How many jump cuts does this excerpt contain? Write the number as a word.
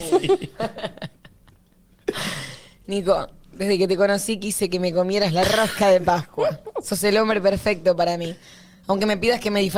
zero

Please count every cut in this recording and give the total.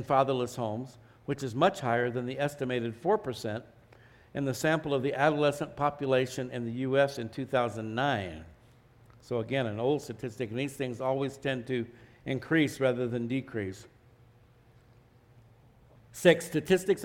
zero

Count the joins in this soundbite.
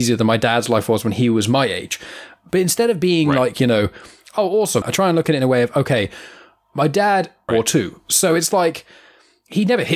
two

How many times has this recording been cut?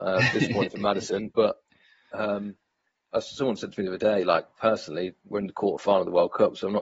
two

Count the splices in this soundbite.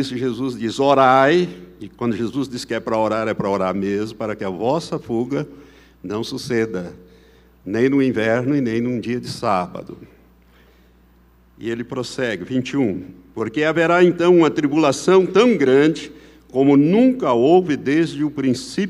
zero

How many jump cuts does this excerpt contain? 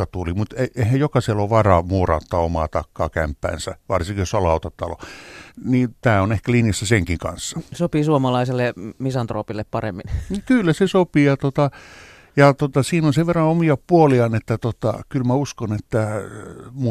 one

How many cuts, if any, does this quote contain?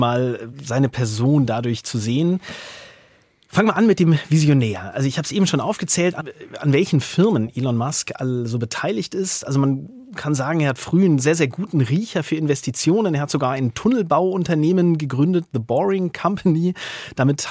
zero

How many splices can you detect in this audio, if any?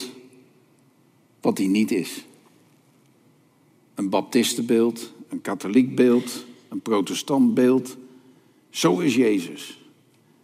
one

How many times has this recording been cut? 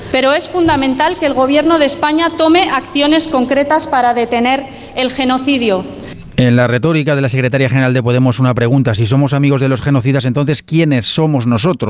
zero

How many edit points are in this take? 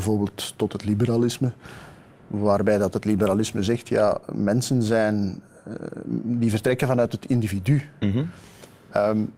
zero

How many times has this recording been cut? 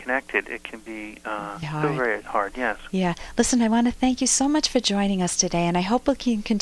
one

